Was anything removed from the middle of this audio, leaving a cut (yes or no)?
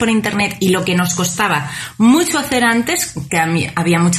yes